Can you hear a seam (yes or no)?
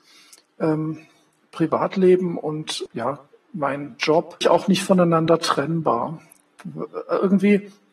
yes